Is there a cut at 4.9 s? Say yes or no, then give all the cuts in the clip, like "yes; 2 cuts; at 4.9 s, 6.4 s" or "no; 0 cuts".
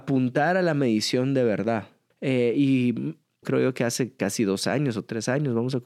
no; 2 cuts; at 2.1 s, 3.4 s